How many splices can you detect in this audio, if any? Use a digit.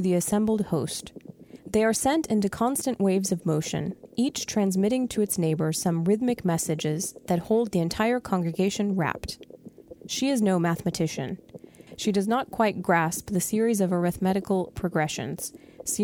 1